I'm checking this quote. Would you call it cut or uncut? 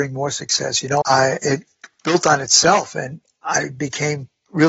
cut